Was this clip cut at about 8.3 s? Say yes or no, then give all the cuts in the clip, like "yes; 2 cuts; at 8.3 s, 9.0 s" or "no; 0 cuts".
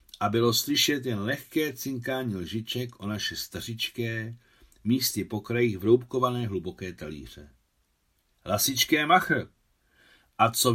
yes; 1 cut; at 8.3 s